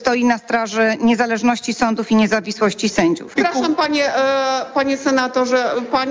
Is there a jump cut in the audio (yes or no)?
yes